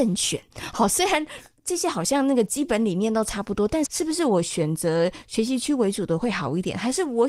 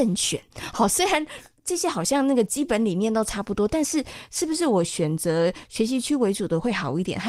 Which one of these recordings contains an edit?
first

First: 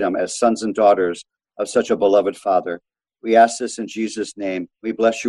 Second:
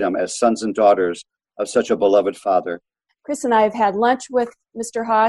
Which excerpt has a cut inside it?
second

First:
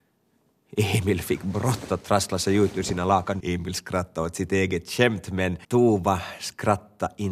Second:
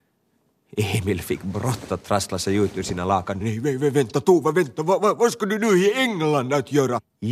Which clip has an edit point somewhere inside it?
first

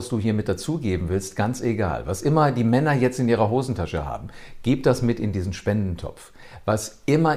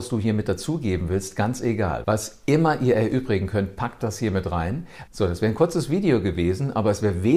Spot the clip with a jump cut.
second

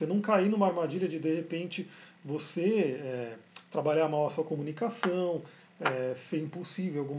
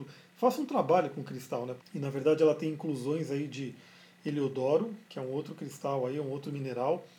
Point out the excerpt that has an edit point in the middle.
second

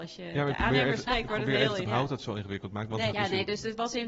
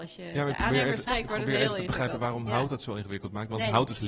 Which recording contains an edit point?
first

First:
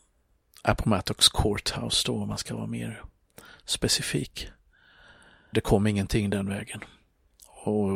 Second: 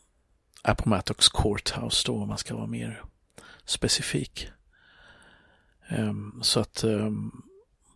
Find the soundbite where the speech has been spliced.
first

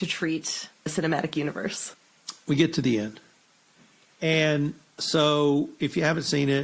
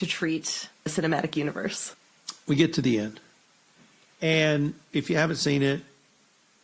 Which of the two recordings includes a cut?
second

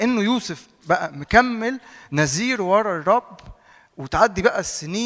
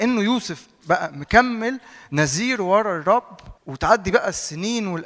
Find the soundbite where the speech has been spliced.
second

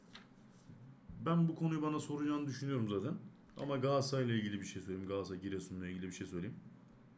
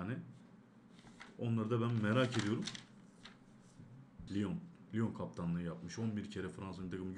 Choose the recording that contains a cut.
second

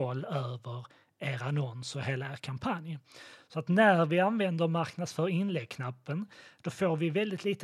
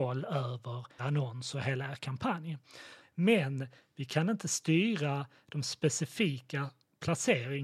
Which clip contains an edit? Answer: second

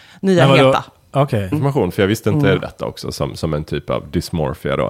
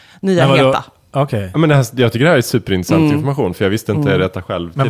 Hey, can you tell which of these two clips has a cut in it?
first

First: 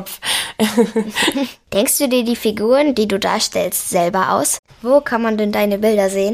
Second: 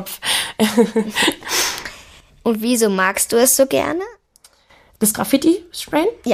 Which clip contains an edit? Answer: first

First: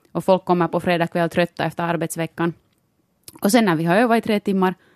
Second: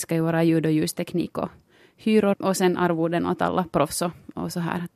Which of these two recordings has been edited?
second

